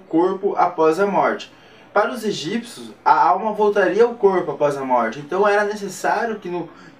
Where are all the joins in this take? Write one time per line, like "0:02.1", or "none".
none